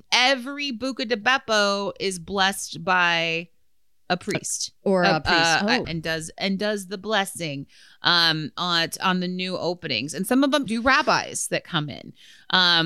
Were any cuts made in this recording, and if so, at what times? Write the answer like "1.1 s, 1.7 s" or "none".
4.8 s, 5.8 s, 10.7 s

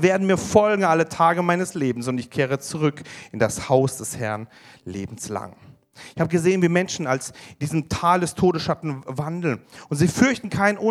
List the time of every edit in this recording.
none

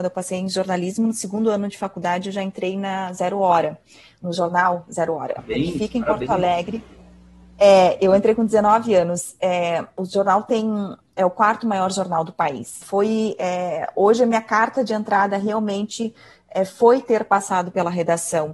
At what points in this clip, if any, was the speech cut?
12.8 s

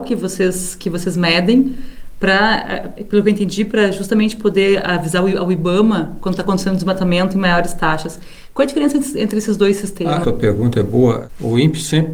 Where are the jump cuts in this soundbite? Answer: 10.2 s

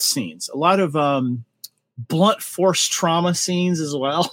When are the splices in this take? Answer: none

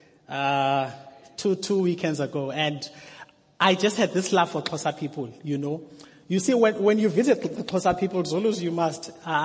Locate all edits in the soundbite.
none

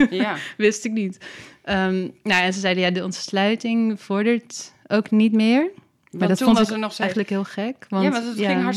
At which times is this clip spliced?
none

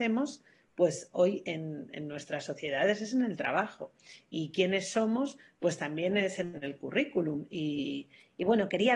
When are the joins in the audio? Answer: none

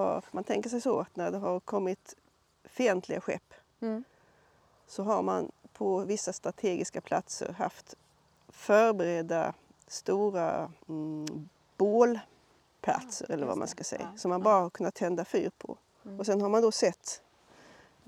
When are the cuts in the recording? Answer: 10.8 s

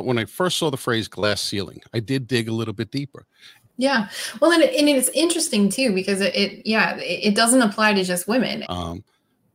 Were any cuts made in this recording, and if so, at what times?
3.7 s, 8.6 s

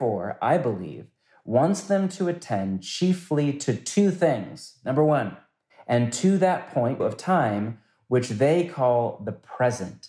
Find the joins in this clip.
5.7 s, 7.0 s

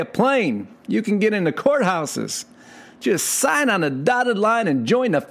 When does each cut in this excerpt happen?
none

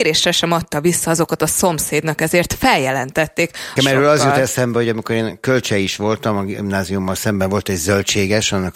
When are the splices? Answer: 3.8 s

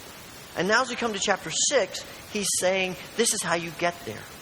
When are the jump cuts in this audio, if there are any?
none

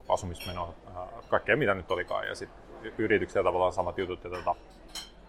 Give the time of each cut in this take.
1.2 s

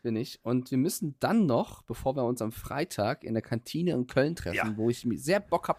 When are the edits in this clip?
none

